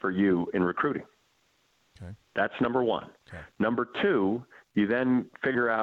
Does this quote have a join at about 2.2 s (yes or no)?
no